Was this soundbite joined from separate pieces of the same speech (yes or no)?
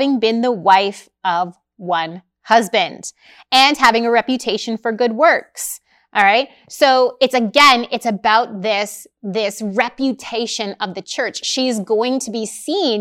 no